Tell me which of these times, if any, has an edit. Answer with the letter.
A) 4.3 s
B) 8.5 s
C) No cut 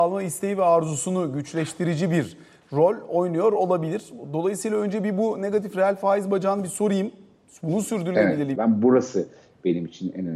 B